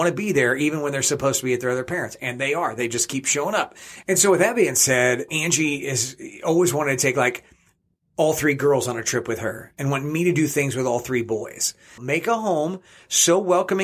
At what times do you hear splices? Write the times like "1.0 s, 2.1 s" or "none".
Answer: 5.3 s, 12.0 s